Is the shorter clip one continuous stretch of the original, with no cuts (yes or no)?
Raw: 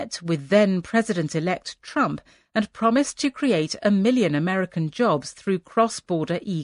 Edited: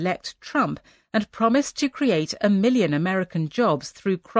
yes